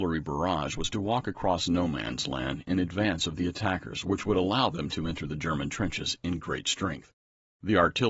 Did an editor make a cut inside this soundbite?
no; 0 cuts

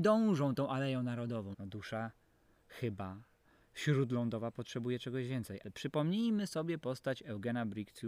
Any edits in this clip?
yes; 2 cuts; at 1.5 s, 5.6 s

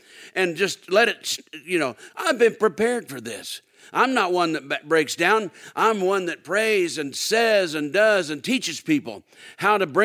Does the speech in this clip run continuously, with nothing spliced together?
no; 1 cut; at 2.1 s

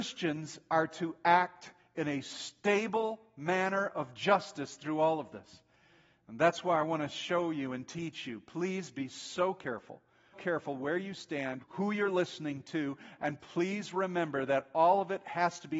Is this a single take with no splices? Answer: no; 2 cuts; at 10.3 s, 11.6 s

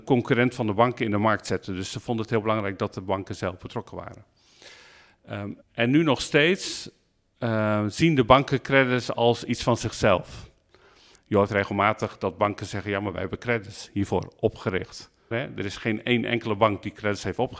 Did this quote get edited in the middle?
yes; 2 cuts; at 5.6 s, 15.3 s

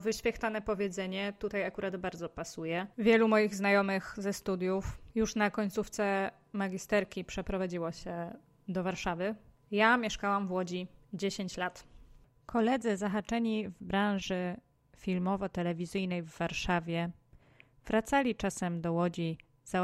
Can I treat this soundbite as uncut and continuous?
yes; 0 cuts

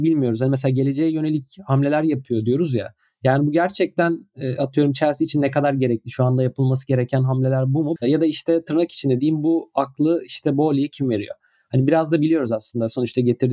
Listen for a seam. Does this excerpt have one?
yes; 1 cut; at 8.0 s

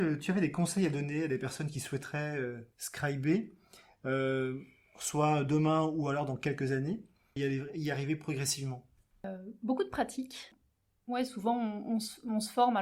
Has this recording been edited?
yes; 1 cut; at 7.4 s

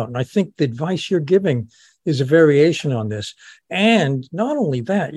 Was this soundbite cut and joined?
no; 0 cuts

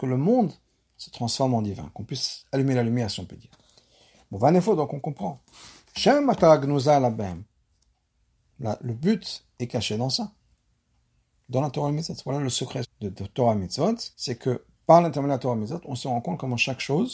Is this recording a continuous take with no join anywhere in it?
no; 2 cuts; at 12.8 s, 14.1 s

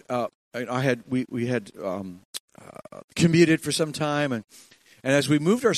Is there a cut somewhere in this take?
no; 0 cuts

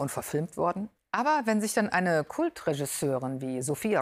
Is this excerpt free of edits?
no; 1 cut; at 1.0 s

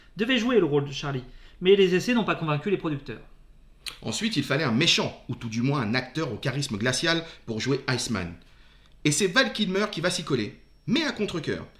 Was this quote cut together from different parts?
no; 0 cuts

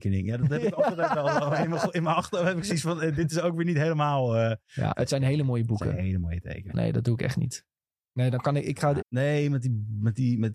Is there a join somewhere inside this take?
yes; 3 cuts; at 4.9 s, 6.7 s, 9.0 s

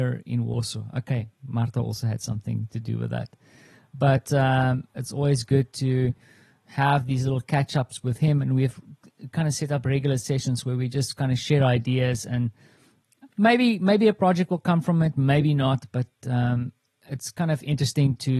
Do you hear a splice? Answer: no; 0 cuts

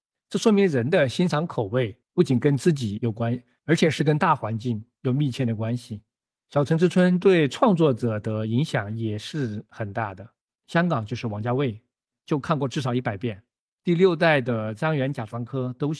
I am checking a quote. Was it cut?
yes; 2 cuts; at 2.0 s, 12.1 s

